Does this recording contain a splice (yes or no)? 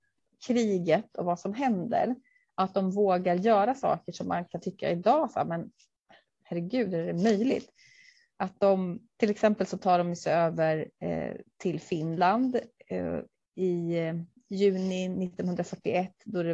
yes